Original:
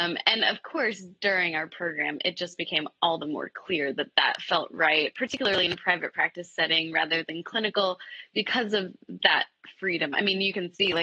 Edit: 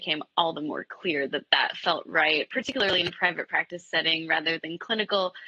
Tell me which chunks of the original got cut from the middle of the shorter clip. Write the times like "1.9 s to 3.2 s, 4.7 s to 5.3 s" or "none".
none